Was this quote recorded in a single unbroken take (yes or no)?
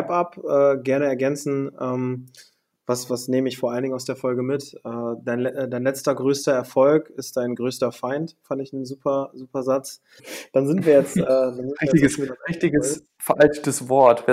no